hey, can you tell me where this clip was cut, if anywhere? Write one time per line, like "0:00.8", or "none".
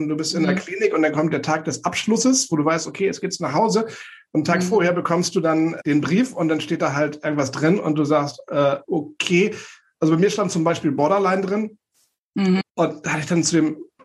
0:05.8
0:12.6